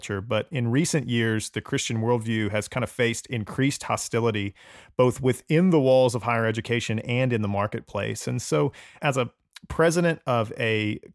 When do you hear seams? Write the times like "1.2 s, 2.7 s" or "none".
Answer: 9.0 s